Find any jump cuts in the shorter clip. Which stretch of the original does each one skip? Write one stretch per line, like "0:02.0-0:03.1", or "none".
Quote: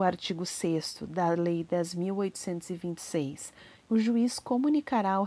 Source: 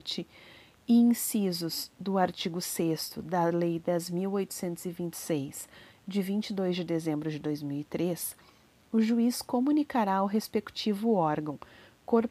0:06.0-0:08.8